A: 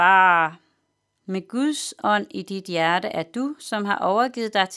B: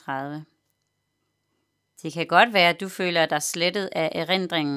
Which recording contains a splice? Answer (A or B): A